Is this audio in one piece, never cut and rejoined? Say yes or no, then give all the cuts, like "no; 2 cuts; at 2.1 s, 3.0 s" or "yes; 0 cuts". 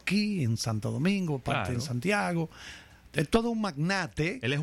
yes; 0 cuts